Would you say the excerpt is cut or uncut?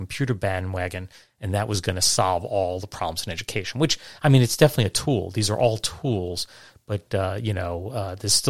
uncut